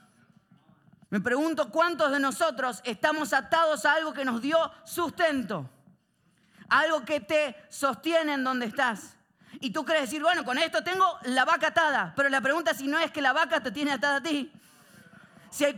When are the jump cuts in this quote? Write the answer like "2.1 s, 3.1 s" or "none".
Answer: none